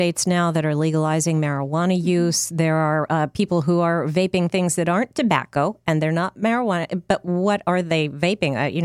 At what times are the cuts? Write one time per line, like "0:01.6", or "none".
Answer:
none